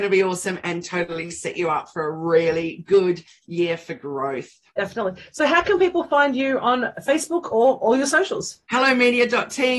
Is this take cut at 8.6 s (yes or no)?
yes